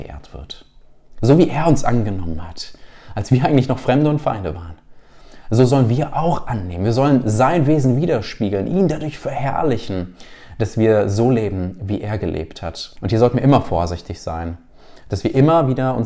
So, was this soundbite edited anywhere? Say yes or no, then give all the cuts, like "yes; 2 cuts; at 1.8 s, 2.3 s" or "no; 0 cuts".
yes; 1 cut; at 13.0 s